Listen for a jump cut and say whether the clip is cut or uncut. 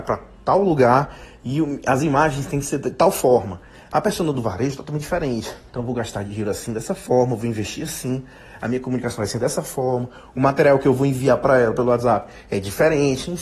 uncut